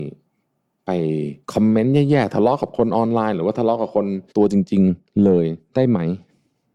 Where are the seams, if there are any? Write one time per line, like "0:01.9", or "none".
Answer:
0:01.4
0:04.3